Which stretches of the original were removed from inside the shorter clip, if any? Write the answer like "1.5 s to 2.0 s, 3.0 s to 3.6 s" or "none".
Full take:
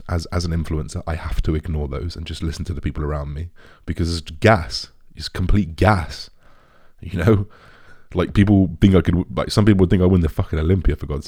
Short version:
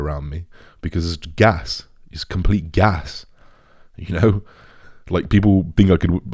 none